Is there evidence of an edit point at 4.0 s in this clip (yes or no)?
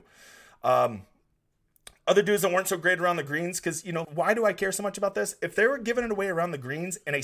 yes